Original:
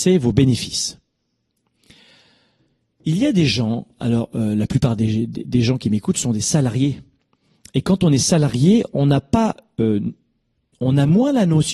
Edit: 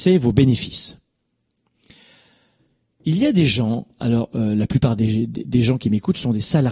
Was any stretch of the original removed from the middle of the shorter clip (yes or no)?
no